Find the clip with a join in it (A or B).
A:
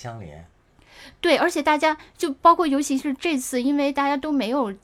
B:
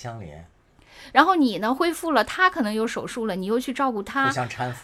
B